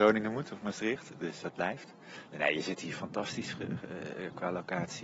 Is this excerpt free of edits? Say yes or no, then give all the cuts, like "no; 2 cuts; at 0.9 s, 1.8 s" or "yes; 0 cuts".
no; 1 cut; at 1.4 s